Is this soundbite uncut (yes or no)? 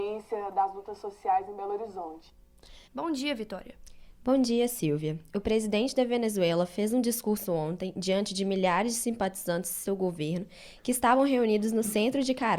no